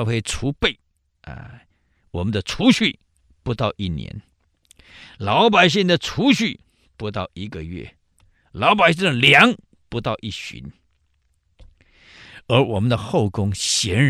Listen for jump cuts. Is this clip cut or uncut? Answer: uncut